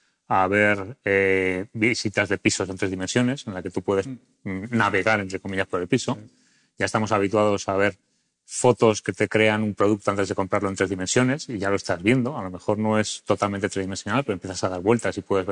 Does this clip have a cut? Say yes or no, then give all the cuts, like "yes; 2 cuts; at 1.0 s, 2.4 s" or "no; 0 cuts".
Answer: no; 0 cuts